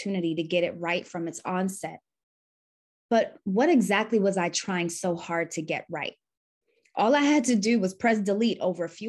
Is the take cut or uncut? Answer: uncut